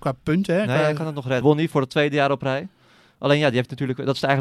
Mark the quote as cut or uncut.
cut